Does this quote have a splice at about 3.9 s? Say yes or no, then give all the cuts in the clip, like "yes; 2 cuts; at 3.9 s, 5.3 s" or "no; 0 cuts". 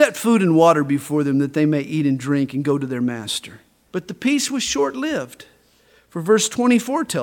yes; 1 cut; at 3.9 s